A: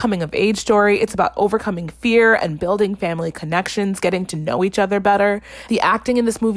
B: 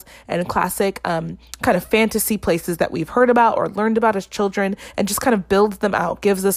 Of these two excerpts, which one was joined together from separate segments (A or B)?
A